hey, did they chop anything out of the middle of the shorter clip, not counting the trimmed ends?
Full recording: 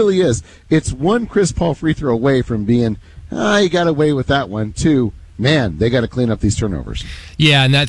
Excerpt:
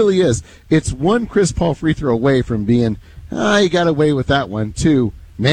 no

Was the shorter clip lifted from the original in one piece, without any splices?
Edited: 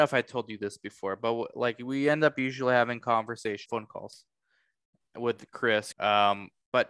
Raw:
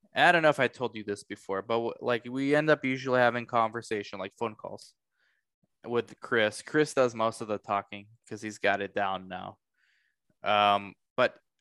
no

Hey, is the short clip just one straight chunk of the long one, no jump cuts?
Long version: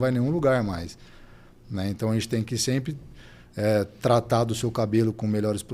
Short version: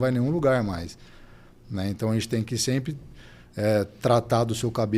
yes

